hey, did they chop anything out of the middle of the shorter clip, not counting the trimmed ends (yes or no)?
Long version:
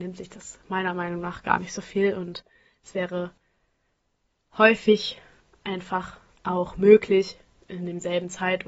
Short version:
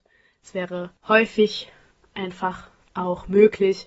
yes